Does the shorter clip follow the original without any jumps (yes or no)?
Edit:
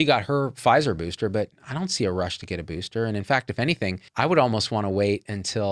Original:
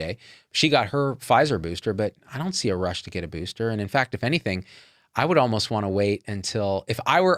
no